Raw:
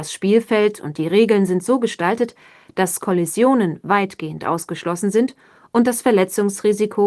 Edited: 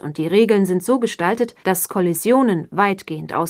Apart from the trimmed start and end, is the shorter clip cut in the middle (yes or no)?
yes